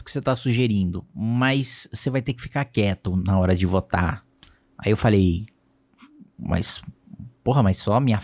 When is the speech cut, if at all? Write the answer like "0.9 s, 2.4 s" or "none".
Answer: none